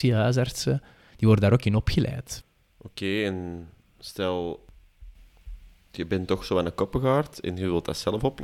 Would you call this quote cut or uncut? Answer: uncut